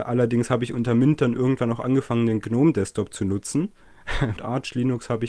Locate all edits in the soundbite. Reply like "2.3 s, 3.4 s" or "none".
4.4 s

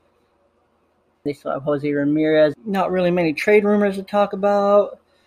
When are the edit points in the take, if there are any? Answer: 1.3 s, 2.5 s

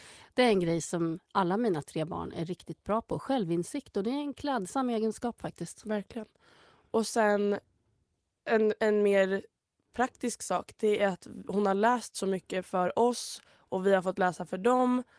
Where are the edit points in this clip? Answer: none

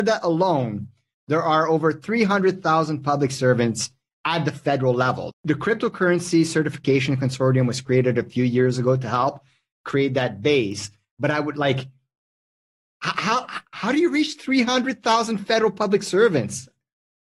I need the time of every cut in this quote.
5.3 s

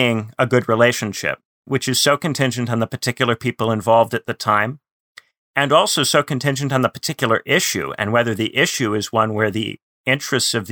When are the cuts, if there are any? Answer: none

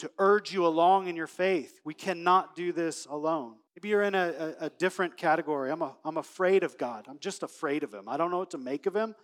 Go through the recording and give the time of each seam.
3.7 s

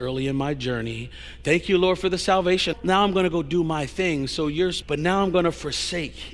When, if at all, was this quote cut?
2.7 s, 4.8 s

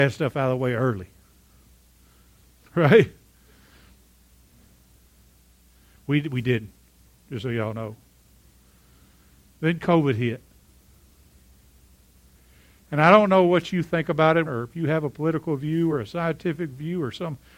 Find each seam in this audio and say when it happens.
14.5 s, 15.9 s

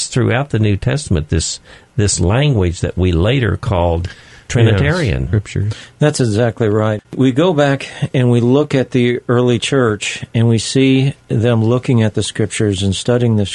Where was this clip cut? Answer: 5.3 s

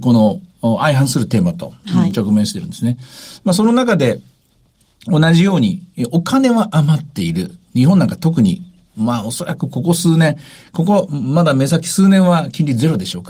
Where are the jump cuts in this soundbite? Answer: none

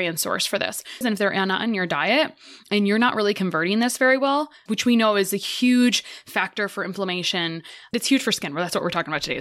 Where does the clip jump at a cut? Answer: 1.0 s, 4.7 s

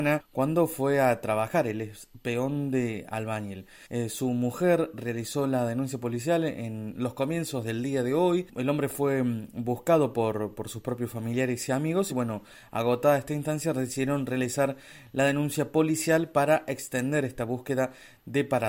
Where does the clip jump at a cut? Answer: none

